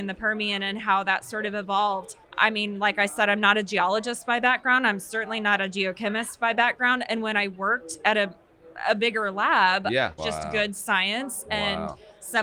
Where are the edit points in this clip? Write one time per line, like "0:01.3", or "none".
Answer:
0:02.2
0:10.2

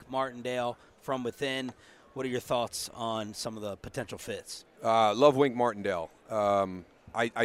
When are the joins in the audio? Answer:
none

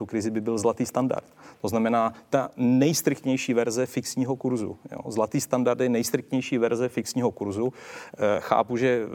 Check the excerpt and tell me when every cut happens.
none

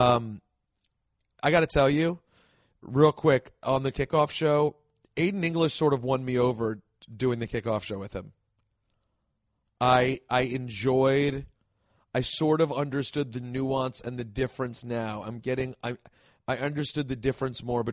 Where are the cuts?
none

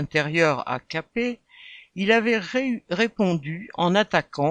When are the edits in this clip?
none

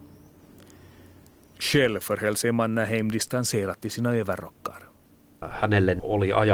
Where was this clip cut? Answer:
none

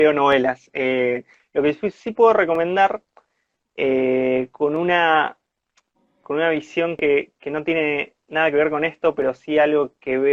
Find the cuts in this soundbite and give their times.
none

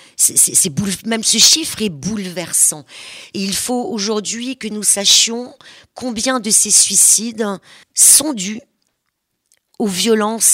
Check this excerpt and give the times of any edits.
0:07.8

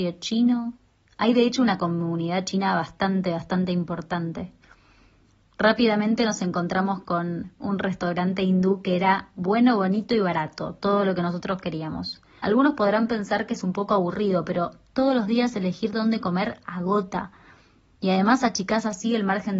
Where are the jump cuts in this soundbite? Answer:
0:12.4

